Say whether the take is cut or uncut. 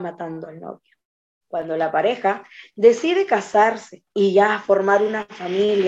cut